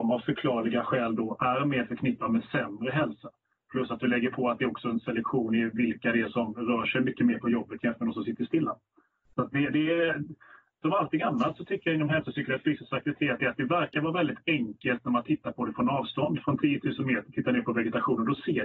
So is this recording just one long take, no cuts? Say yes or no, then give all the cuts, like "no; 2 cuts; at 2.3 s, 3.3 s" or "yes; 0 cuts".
yes; 0 cuts